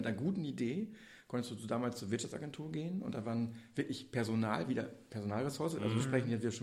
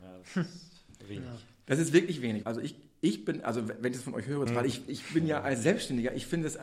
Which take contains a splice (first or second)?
second